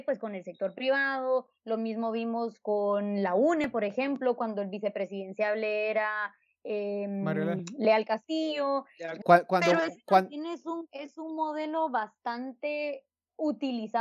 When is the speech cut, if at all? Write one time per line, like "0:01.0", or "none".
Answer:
0:09.2